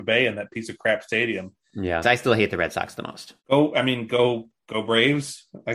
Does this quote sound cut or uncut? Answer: cut